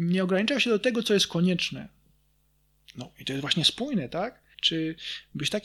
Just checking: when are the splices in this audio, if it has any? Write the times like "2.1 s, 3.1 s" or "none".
4.5 s